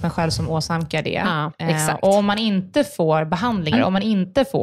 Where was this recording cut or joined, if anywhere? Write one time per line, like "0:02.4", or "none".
0:03.7